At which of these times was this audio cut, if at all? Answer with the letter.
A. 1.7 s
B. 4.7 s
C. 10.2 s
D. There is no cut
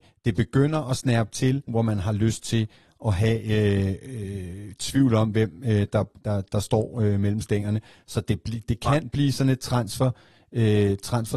A